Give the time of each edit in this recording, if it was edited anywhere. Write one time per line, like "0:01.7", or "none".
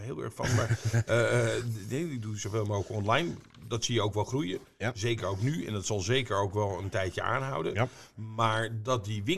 none